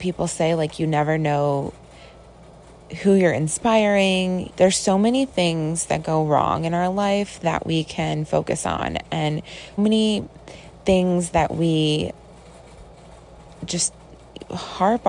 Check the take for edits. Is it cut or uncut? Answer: cut